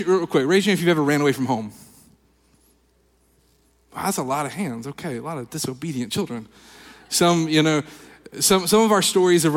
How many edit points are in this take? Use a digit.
0